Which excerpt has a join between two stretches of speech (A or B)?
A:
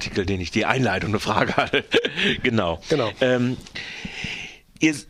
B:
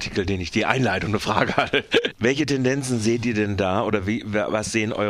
B